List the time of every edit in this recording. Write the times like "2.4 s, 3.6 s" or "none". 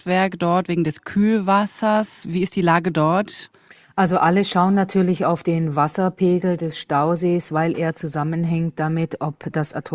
none

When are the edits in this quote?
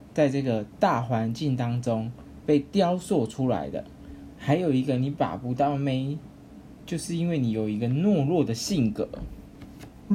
4.4 s

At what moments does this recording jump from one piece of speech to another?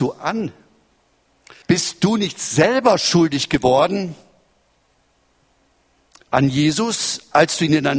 1.6 s

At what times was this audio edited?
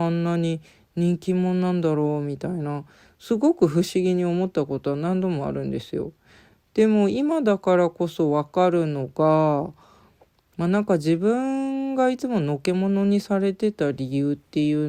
none

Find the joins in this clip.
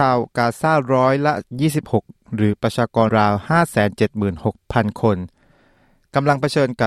3.1 s

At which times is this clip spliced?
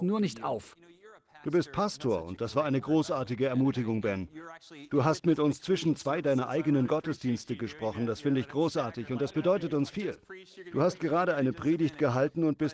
none

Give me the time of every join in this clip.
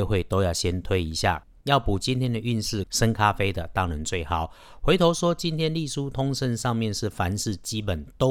2.8 s

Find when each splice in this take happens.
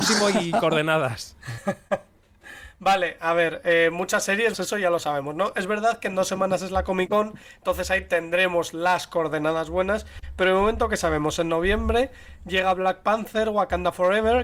4.5 s

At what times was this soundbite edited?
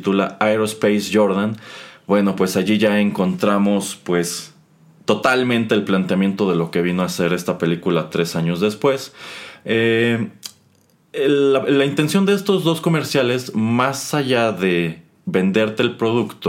none

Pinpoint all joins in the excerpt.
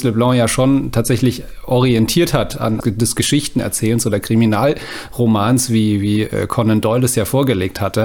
2.8 s

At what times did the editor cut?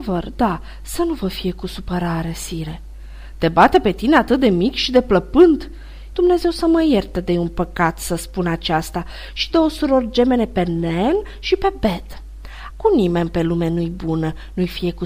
6.1 s, 12.7 s

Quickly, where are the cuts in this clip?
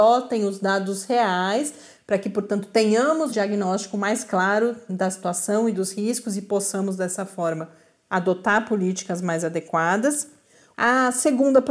3.3 s, 10.7 s

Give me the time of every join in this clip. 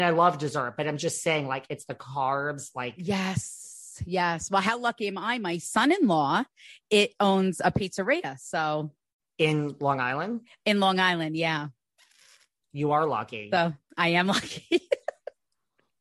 none

